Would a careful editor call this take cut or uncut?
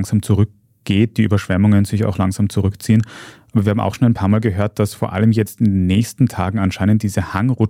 uncut